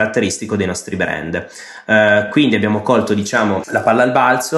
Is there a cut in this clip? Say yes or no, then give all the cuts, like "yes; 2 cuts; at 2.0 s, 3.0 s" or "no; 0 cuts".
no; 0 cuts